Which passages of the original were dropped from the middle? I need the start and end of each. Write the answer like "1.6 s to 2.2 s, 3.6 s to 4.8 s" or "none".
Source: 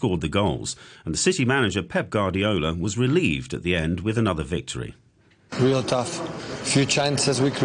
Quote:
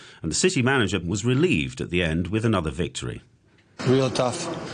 1.8 s to 2.7 s